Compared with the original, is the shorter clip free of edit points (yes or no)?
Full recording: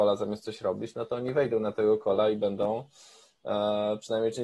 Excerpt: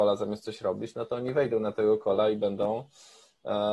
yes